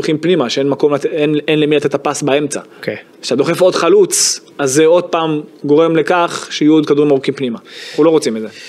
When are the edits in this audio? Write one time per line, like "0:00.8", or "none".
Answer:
0:02.7
0:04.5